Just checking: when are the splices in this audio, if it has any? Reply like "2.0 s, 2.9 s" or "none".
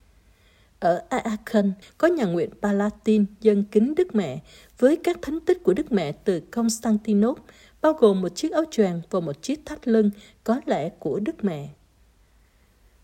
1.8 s